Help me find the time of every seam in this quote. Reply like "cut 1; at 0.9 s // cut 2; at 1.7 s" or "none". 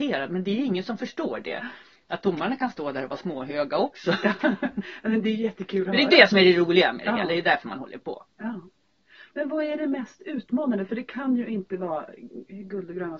none